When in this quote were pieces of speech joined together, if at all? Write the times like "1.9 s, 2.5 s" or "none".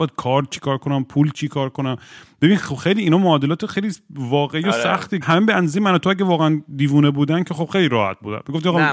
5.2 s